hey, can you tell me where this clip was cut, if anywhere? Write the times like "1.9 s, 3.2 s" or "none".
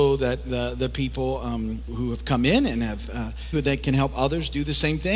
1.9 s, 3.5 s